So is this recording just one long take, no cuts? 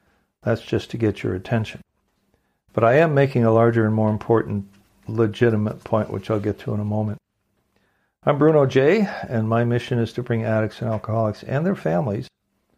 yes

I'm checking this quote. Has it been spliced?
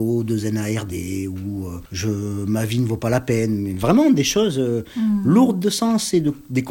no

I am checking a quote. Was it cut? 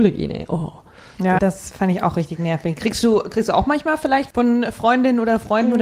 yes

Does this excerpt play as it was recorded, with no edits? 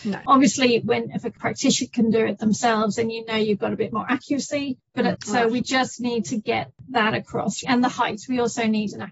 no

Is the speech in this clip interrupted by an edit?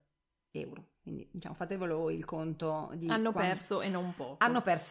no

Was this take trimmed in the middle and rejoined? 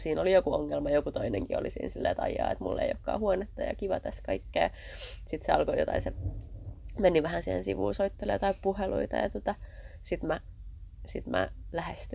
no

